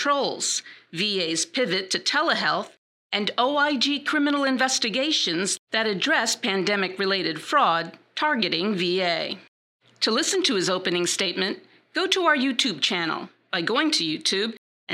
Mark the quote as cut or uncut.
uncut